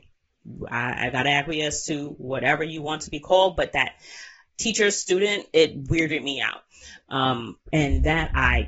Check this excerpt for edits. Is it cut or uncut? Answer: uncut